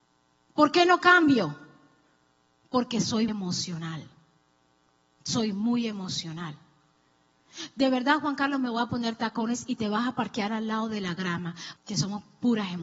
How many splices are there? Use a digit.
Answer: 2